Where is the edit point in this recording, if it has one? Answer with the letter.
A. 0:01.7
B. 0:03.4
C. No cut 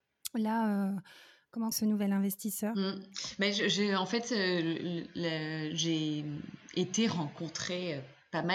A